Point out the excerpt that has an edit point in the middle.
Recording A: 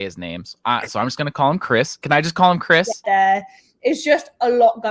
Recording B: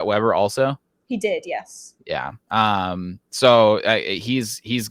A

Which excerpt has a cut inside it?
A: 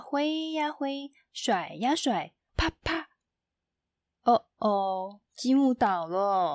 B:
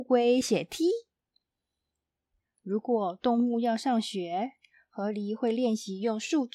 A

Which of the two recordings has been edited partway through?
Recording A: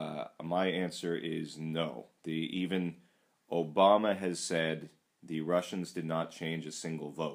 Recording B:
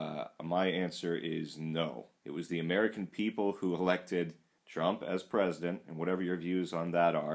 B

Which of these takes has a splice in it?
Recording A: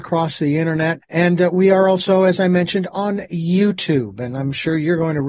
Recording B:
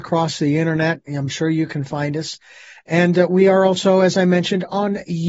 A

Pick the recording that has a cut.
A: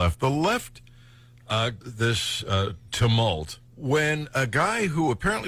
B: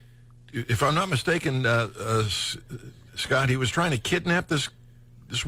A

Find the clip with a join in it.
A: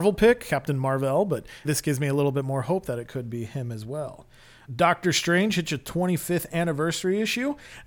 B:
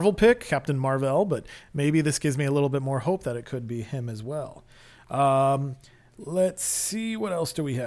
A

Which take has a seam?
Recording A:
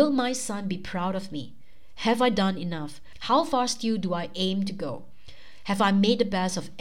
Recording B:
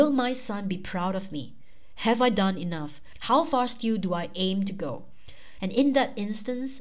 B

